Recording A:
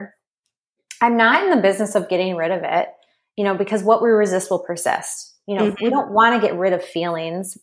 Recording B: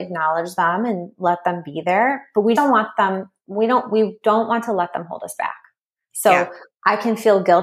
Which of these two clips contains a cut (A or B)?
B